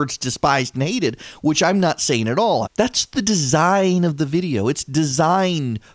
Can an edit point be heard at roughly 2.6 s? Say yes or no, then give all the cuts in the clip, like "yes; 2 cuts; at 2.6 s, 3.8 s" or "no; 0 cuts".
yes; 1 cut; at 2.6 s